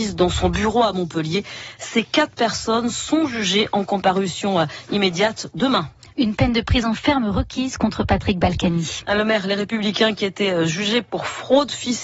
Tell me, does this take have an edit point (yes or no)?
no